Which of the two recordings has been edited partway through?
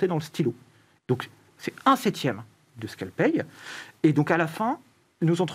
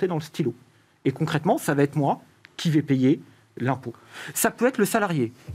first; 1 cut; at 1.0 s

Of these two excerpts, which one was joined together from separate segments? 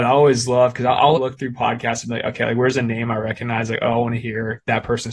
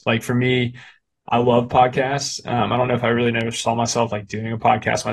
first; 1 cut; at 1.2 s

